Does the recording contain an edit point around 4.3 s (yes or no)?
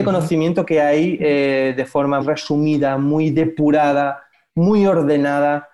no